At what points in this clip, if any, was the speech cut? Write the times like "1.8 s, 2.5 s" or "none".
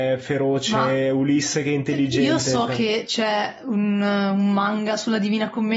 none